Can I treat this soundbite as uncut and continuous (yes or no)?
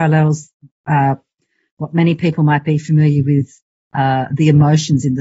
yes